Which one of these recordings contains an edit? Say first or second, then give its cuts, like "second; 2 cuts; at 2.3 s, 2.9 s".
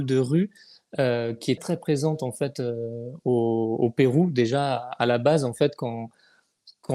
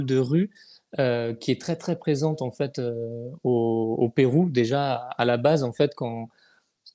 first; 1 cut; at 1.6 s